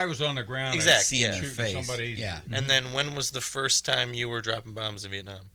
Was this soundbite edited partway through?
yes; 1 cut; at 2.5 s

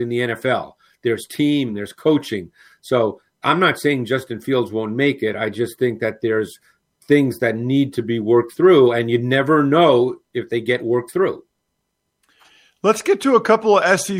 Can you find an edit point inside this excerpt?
yes; 1 cut; at 1.7 s

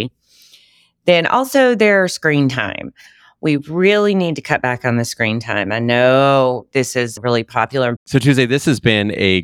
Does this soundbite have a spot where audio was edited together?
yes; 1 cut; at 8.0 s

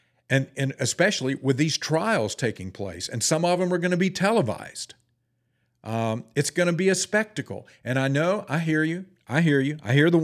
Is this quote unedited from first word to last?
yes; 0 cuts

